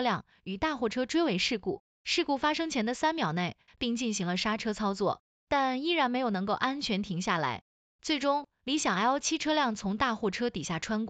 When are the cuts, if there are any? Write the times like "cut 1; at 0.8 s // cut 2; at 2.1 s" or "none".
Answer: cut 1; at 2.0 s // cut 2; at 3.7 s

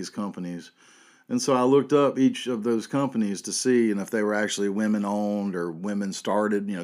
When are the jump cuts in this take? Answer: none

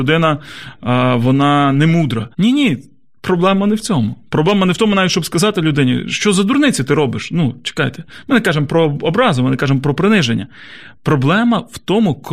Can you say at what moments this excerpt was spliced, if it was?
cut 1; at 2.3 s

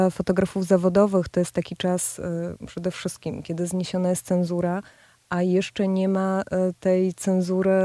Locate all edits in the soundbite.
none

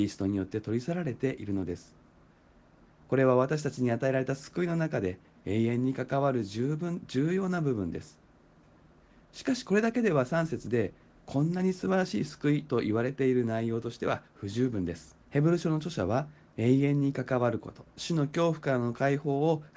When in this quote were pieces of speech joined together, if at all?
cut 1; at 15.2 s

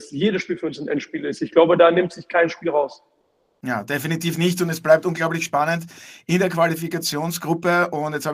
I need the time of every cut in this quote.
none

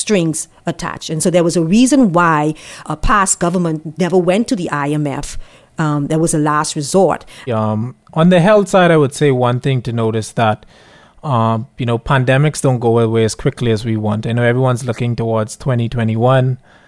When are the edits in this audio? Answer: cut 1; at 2.8 s // cut 2; at 7.5 s

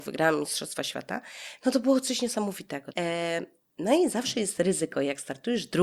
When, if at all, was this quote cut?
cut 1; at 2.9 s

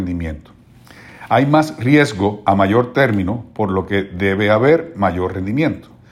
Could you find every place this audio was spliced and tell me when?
none

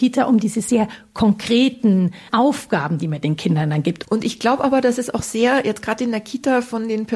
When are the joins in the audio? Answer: cut 1; at 4.0 s

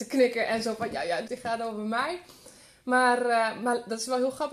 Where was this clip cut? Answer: cut 1; at 1.3 s

